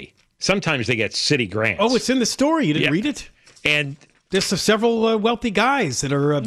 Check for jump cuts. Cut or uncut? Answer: uncut